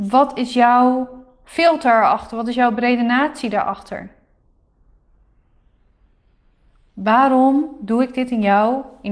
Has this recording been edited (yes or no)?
no